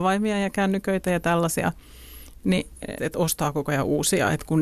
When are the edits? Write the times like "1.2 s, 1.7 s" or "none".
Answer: 3.0 s